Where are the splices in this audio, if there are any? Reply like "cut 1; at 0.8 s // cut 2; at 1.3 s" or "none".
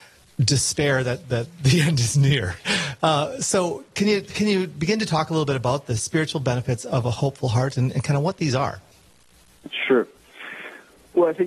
none